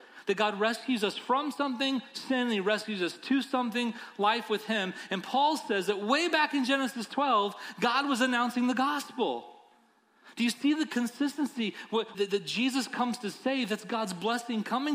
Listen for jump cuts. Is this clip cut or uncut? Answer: cut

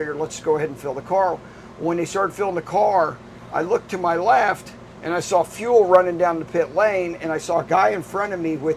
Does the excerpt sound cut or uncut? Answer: uncut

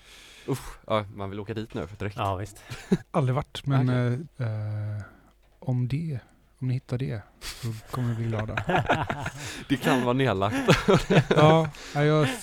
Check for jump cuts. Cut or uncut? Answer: cut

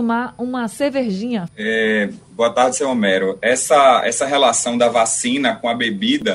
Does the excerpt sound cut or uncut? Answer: cut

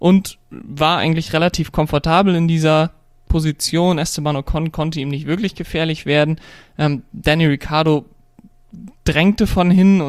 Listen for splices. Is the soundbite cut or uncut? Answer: uncut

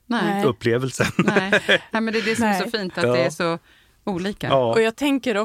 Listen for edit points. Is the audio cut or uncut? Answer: uncut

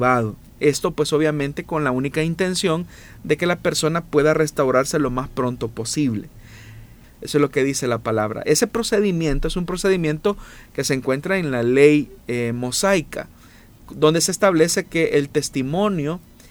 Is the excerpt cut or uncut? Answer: cut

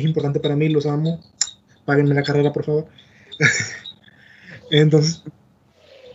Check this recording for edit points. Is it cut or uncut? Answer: uncut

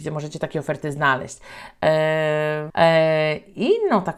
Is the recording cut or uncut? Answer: cut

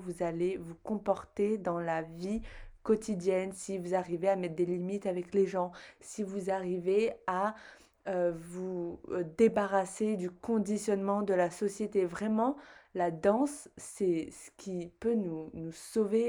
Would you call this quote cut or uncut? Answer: uncut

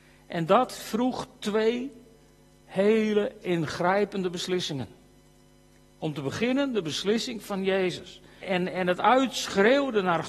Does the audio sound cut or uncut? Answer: cut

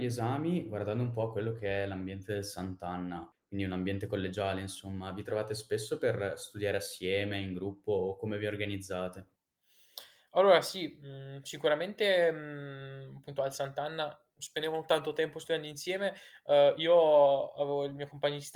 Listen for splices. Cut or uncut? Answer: uncut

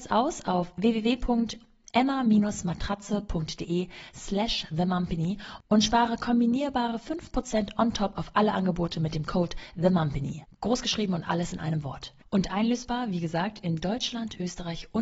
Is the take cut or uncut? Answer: uncut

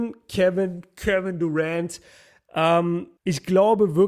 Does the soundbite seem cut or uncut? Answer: cut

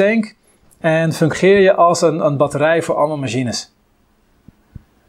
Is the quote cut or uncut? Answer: uncut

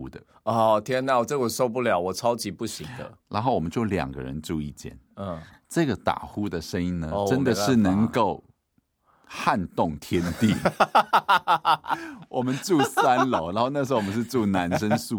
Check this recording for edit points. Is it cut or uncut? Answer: uncut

